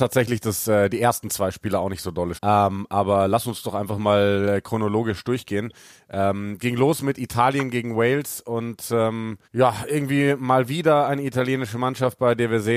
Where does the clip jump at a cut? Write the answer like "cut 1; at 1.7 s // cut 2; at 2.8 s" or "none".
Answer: cut 1; at 2.3 s // cut 2; at 9.4 s